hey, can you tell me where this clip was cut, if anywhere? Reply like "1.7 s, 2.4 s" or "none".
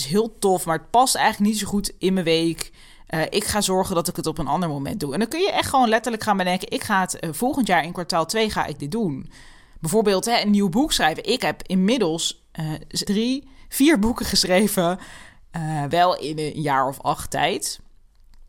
13.1 s